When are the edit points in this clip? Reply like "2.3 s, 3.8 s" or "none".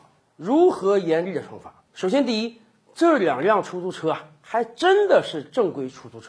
none